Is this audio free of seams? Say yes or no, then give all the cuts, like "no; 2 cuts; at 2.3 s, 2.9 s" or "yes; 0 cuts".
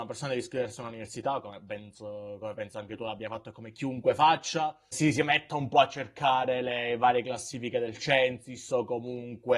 no; 1 cut; at 4.9 s